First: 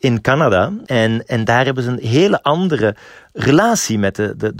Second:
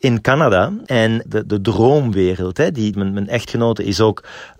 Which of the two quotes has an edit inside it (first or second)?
second